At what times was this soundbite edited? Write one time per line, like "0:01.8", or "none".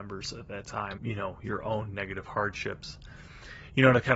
0:01.0